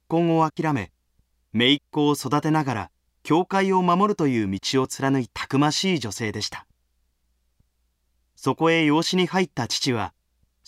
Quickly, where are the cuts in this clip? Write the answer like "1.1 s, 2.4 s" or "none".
5.3 s